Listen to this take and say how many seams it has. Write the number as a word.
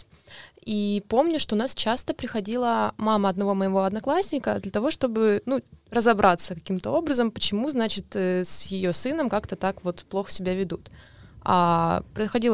zero